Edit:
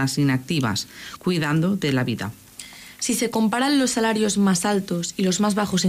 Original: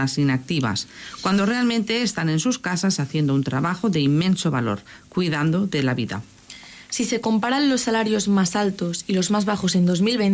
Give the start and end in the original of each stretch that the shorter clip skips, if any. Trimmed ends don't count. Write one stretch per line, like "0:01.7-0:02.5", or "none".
0:01.2-0:05.1